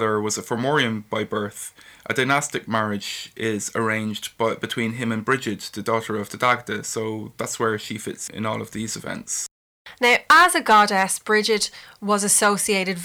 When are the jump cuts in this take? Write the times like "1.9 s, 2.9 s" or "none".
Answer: 8.3 s